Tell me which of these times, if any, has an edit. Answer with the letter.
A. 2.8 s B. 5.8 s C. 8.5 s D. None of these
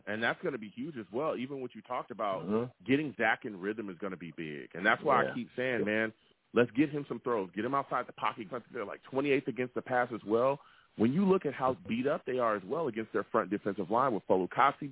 C